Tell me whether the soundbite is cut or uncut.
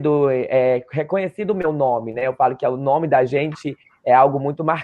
uncut